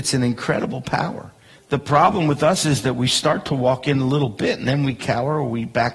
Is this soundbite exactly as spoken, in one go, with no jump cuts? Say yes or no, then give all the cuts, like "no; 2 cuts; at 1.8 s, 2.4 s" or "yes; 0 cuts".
no; 1 cut; at 1.6 s